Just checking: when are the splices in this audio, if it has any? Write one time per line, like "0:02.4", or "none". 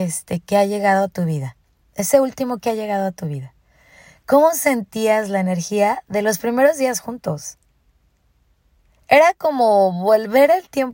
none